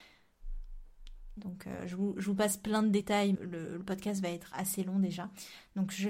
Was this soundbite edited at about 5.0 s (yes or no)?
no